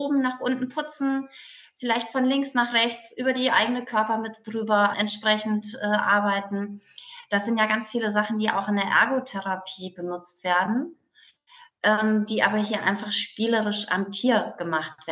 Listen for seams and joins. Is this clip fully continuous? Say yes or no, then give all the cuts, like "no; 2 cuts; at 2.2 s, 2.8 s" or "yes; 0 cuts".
no; 1 cut; at 4.9 s